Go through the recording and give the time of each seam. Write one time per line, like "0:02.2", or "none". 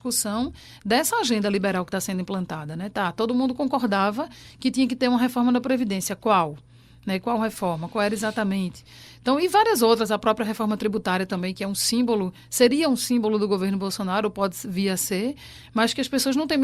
none